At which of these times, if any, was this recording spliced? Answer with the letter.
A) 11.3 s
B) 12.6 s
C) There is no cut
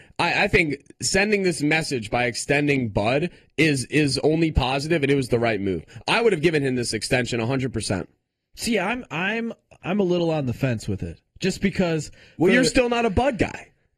C